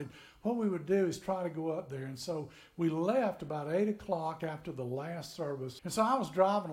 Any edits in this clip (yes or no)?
yes